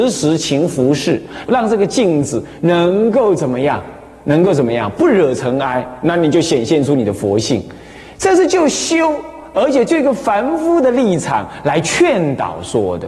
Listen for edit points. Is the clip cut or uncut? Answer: cut